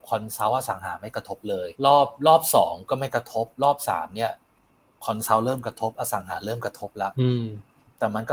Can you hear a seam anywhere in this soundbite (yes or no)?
yes